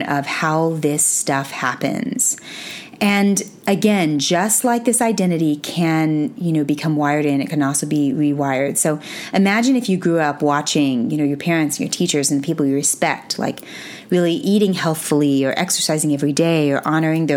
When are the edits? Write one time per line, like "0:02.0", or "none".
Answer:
none